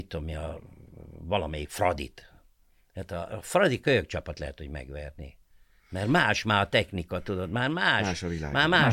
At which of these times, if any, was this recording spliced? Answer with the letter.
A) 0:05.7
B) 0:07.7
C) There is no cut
C